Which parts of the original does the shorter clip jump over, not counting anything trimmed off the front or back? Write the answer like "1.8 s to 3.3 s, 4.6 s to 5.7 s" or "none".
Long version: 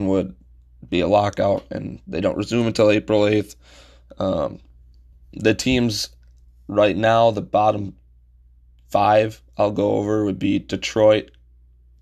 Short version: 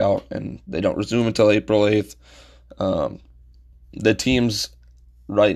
none